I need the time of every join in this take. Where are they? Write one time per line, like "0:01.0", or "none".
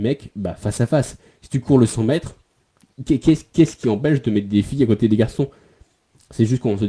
none